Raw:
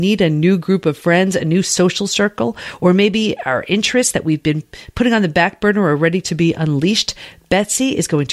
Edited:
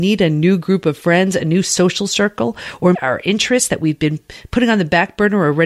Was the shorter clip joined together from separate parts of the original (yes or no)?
yes